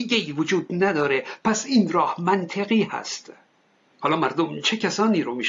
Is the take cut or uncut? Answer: uncut